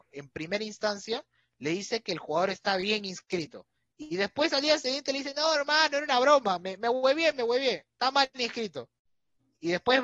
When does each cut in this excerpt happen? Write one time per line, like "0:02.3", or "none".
none

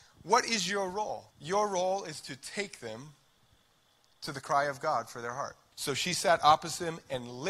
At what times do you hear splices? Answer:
0:01.3
0:05.7

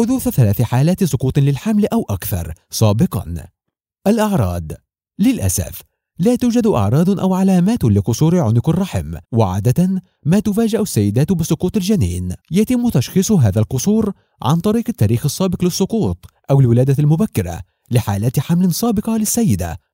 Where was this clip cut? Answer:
0:09.2
0:12.4

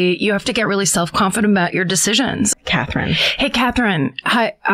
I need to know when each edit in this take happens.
0:02.5

